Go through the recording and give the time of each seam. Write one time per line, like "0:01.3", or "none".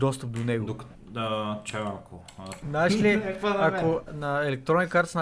0:00.9
0:02.6
0:04.1